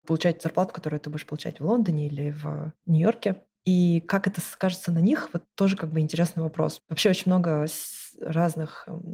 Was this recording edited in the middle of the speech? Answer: yes; 1 cut; at 3.6 s

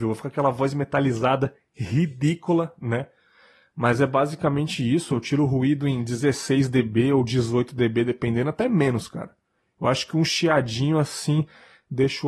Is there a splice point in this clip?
no; 0 cuts

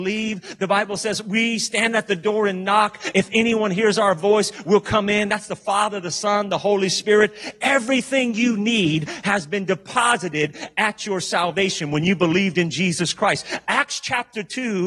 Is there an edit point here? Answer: no; 0 cuts

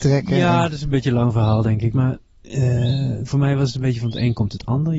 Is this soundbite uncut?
no; 1 cut; at 1.9 s

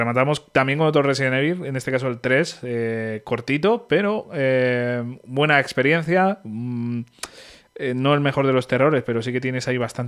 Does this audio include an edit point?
no; 0 cuts

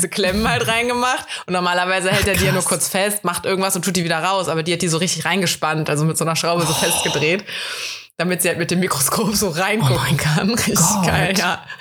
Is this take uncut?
yes; 0 cuts

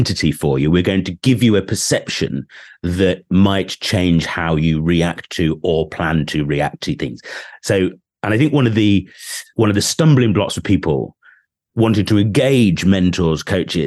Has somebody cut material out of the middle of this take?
yes; 1 cut; at 9.5 s

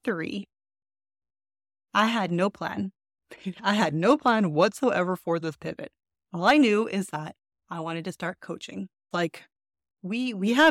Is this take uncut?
no; 1 cut; at 9.1 s

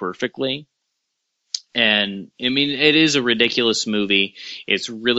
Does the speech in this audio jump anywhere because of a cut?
no; 0 cuts

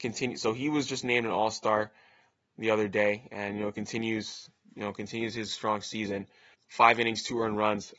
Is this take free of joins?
no; 1 cut; at 6.5 s

